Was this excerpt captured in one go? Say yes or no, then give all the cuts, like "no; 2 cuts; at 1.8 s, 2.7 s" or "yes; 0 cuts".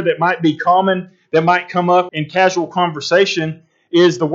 no; 1 cut; at 2.1 s